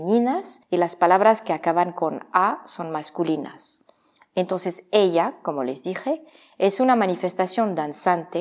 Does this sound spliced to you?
no; 0 cuts

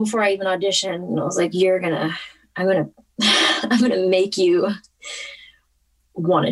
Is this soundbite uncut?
yes; 0 cuts

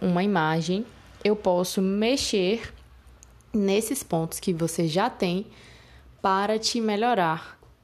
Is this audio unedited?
yes; 0 cuts

